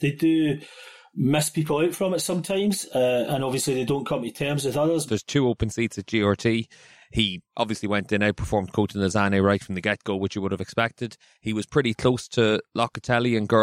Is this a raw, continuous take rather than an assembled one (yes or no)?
no